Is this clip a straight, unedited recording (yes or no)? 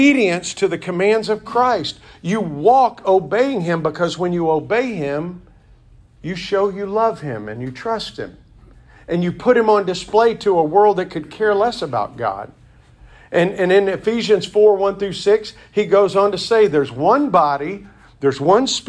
yes